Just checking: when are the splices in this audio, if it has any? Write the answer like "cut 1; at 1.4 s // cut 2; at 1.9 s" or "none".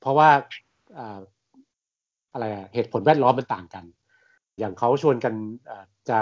cut 1; at 4.6 s